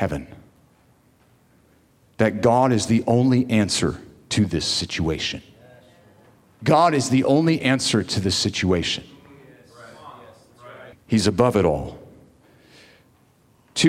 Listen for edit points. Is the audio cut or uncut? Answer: cut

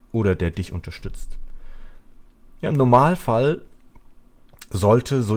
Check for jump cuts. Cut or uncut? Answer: uncut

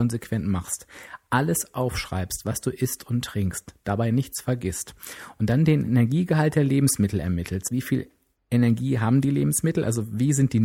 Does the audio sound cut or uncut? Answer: cut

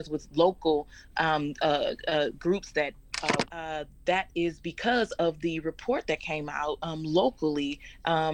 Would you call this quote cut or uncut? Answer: cut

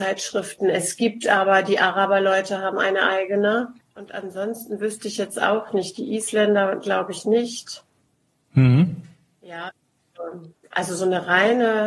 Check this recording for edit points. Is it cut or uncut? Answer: uncut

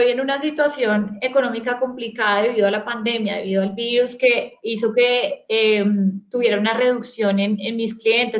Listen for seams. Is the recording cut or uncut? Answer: uncut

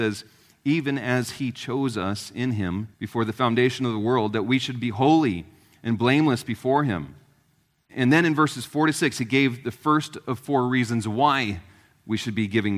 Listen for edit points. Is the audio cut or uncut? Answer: cut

